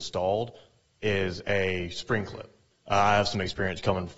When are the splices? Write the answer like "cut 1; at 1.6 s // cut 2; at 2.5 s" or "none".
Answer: cut 1; at 2.7 s

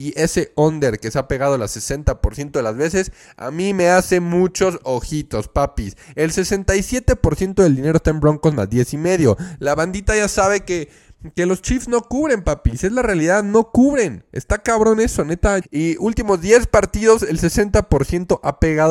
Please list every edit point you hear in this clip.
cut 1; at 15.6 s

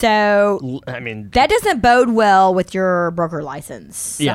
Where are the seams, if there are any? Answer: none

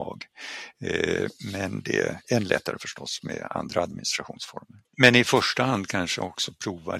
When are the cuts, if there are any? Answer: cut 1; at 4.8 s

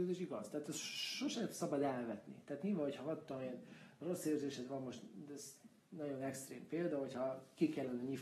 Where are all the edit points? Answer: none

